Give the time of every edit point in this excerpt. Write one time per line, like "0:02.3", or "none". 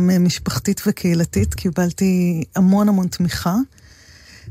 none